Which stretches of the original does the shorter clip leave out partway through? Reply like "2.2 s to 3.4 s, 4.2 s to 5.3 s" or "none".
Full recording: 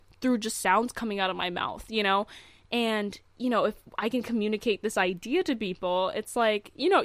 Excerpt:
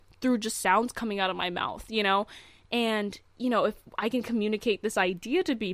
none